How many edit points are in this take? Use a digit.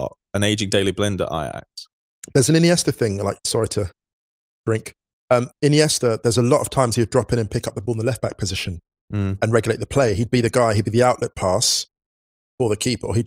0